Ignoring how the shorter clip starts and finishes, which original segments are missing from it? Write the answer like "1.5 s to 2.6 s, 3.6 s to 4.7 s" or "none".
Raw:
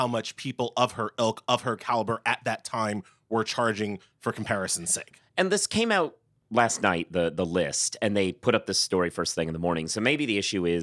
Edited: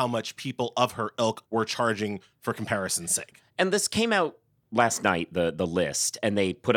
1.5 s to 3.2 s

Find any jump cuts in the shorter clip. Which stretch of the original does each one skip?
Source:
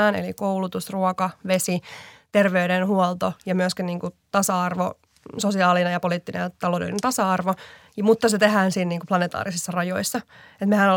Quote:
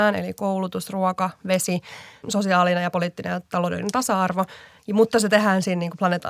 2.2 s to 5.3 s

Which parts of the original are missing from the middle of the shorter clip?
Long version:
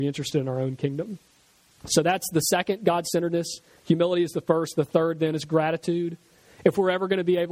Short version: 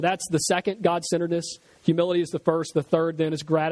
none

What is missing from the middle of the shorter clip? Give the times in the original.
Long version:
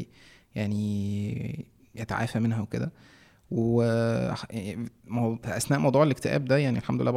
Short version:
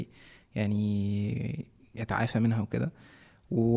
none

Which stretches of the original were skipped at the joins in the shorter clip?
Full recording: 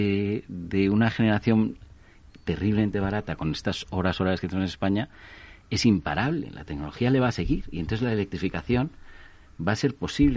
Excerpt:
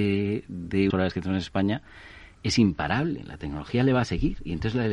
0.9 s to 4.2 s

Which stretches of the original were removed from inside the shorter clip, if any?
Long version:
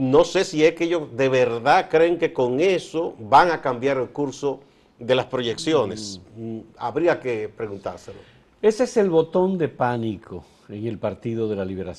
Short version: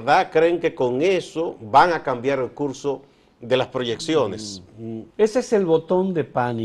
6.7 s to 8.5 s

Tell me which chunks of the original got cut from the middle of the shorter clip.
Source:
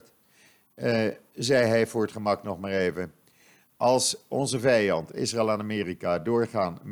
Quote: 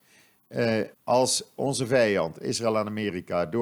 1.2 s to 3.7 s

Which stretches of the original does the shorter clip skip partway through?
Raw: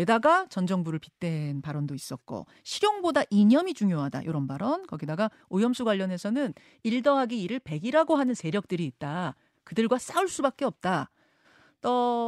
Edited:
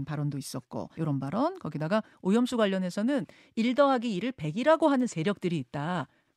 2.5 s to 4.2 s

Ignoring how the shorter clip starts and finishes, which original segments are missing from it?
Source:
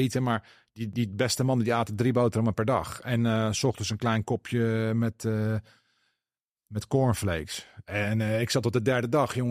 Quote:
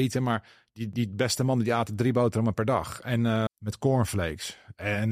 3.5 s to 6.6 s

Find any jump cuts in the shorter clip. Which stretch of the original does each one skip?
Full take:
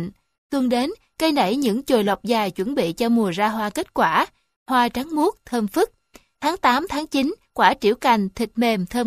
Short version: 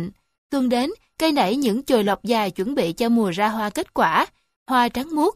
none

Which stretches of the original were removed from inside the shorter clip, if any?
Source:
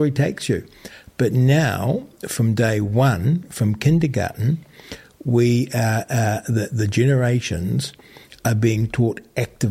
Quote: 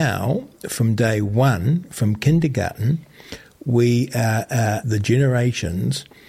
6.4 s to 6.7 s

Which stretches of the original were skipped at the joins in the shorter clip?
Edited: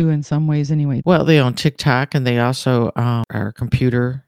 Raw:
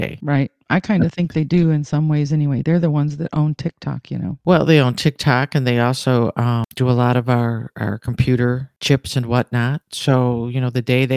2.6 s to 4.4 s, 6.7 s to 7.7 s

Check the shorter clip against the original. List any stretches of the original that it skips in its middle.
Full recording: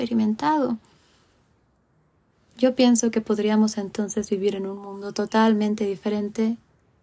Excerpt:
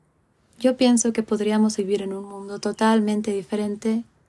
3.7 s to 4.3 s

